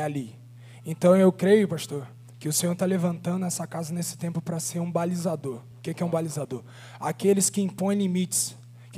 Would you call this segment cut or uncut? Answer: uncut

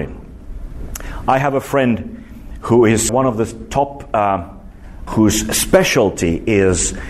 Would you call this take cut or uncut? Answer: cut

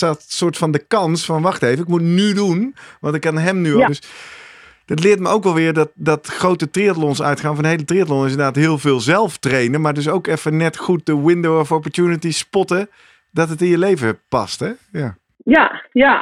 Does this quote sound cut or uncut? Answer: cut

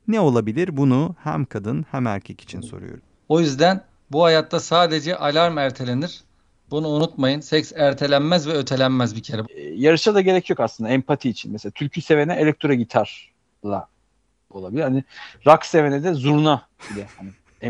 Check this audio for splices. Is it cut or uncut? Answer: cut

